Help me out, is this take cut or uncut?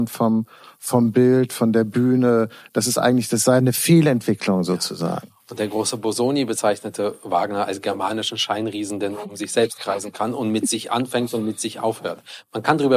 uncut